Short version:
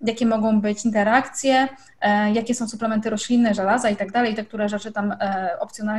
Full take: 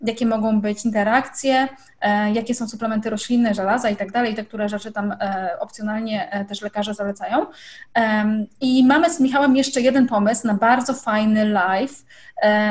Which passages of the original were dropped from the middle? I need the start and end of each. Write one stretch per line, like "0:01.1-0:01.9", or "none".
none